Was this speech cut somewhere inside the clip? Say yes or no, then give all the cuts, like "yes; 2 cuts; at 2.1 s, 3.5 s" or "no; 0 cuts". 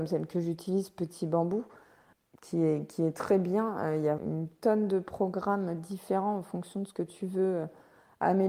yes; 1 cut; at 4.2 s